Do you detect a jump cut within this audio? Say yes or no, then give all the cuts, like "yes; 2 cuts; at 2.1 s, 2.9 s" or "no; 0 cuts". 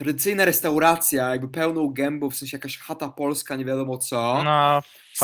no; 0 cuts